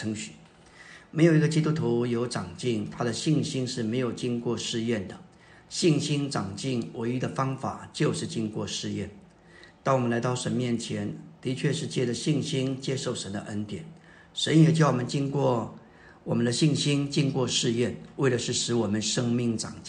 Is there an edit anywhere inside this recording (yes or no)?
no